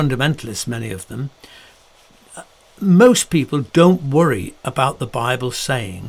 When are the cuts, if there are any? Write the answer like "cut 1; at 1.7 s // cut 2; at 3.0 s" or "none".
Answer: none